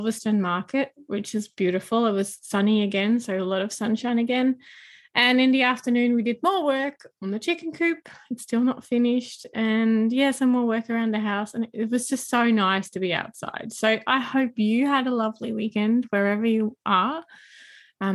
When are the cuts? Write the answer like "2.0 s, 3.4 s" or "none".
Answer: none